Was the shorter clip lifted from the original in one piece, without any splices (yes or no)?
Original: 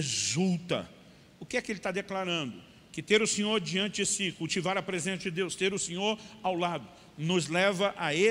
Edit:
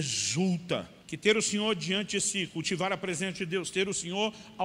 no